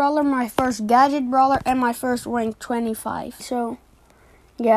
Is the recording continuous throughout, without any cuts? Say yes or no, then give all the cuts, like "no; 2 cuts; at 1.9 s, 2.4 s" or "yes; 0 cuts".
no; 1 cut; at 3.4 s